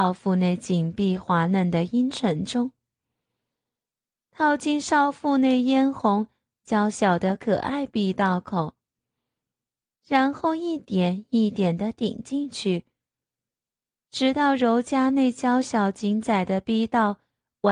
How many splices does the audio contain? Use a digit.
0